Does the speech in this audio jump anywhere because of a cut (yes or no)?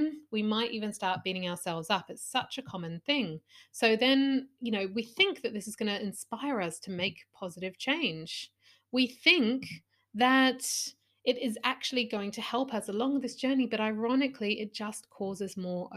no